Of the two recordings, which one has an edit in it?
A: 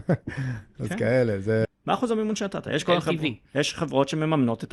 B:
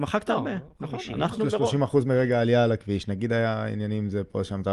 A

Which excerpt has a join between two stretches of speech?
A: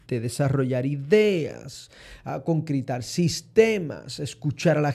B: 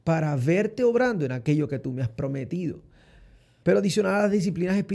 B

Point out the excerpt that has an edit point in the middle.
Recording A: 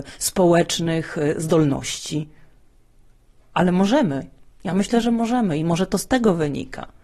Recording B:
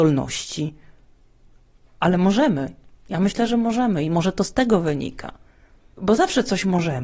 B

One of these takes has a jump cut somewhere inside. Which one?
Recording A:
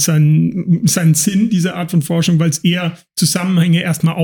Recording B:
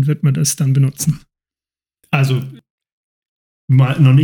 B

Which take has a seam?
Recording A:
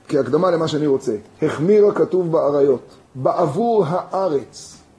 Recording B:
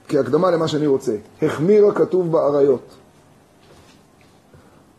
A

